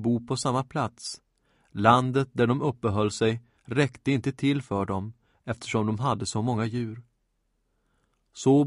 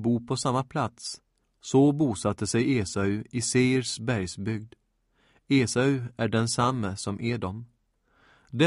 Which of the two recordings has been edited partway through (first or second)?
second